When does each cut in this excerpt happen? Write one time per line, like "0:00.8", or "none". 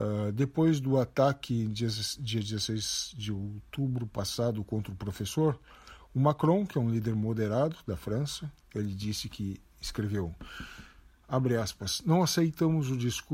none